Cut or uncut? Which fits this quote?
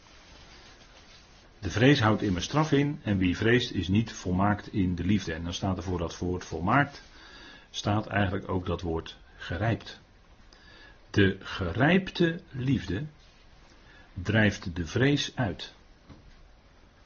cut